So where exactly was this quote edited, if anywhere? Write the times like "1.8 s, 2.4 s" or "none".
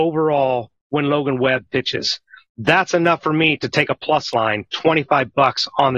none

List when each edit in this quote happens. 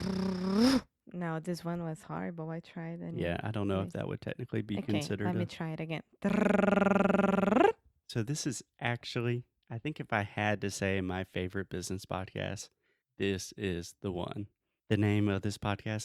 none

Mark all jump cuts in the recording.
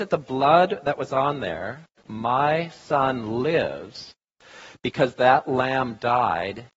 2.0 s

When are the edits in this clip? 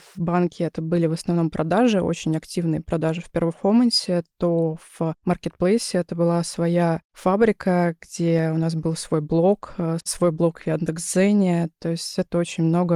10.0 s

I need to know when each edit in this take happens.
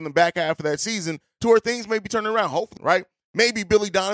2.8 s

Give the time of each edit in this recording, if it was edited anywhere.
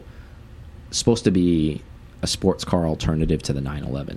none

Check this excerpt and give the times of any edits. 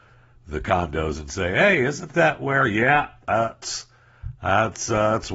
none

